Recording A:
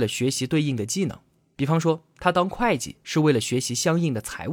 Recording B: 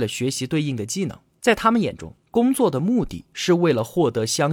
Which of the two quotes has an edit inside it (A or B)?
B